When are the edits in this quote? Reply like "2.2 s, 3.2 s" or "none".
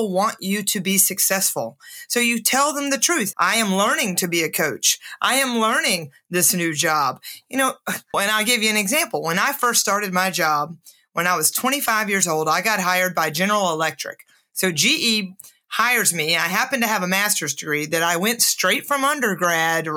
3.3 s, 8.1 s